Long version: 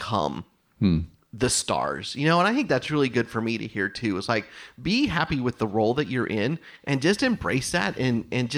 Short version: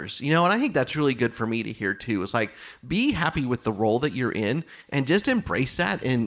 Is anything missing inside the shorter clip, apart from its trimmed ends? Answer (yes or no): no